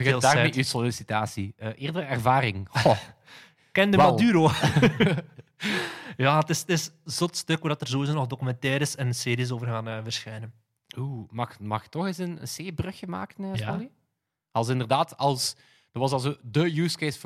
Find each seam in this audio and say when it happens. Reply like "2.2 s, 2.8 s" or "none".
7.1 s

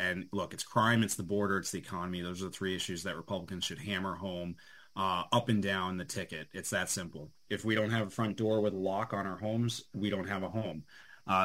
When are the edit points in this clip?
7.5 s

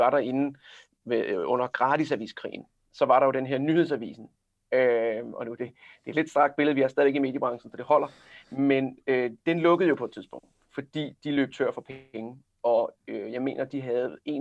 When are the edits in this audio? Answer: none

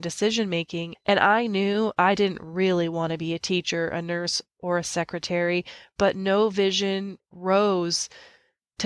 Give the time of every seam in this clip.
0.9 s

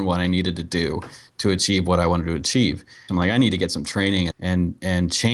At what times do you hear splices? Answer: 3.1 s, 4.3 s

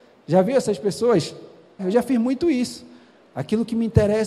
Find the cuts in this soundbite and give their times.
1.8 s

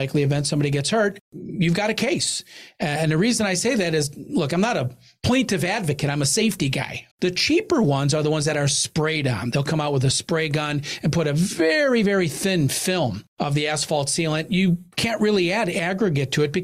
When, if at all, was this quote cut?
7.1 s

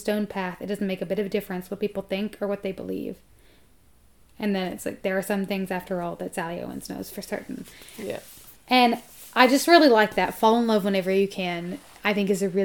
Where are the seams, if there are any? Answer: none

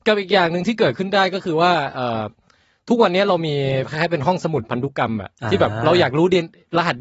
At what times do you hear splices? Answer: none

